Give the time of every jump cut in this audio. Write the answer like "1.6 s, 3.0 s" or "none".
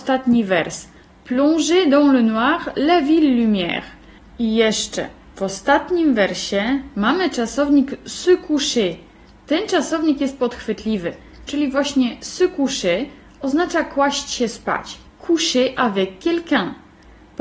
4.2 s, 11.5 s, 15.1 s